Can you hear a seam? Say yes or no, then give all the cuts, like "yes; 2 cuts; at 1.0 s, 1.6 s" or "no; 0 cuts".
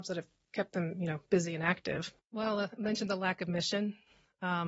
yes; 1 cut; at 2.2 s